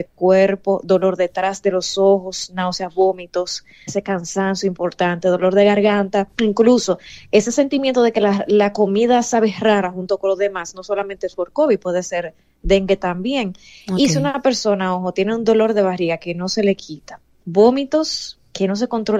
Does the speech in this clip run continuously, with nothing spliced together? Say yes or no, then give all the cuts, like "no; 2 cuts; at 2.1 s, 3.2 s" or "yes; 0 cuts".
no; 2 cuts; at 3.9 s, 6.3 s